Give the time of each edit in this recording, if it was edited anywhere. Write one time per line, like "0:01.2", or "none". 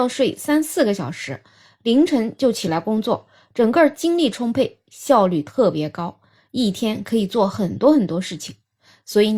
none